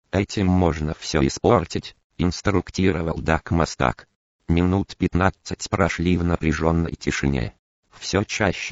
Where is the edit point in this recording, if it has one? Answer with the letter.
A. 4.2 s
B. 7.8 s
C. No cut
C